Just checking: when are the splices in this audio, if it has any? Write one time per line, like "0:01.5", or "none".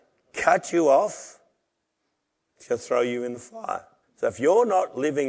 0:04.0